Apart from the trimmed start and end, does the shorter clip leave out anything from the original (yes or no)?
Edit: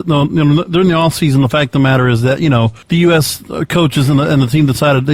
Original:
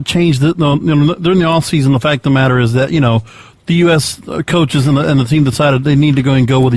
yes